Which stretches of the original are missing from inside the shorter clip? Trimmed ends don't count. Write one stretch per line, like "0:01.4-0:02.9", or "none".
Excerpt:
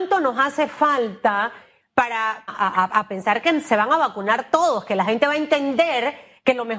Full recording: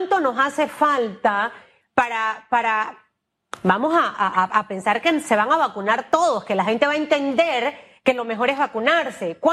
0:02.5-0:04.1

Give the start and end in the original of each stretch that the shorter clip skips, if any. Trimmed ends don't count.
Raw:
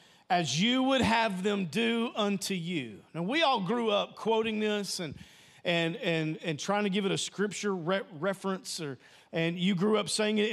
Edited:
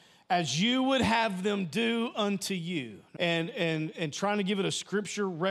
0:03.2-0:05.6

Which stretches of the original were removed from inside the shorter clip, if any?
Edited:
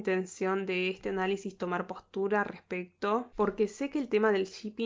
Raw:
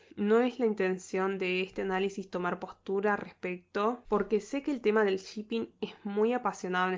none

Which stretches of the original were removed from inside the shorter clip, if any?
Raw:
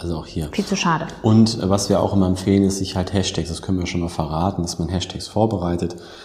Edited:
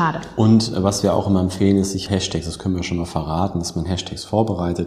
0:02.9-0:03.1

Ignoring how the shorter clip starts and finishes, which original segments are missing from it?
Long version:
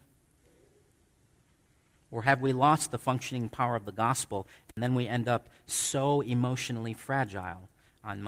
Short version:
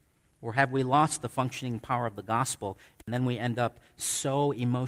none

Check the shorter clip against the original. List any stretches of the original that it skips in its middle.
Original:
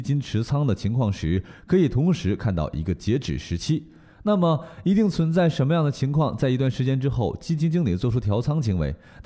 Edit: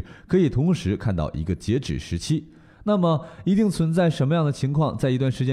none

